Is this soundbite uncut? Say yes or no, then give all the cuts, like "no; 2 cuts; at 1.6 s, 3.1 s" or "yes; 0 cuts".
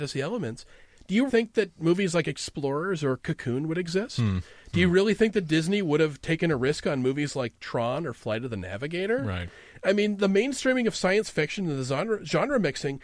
no; 1 cut; at 1.3 s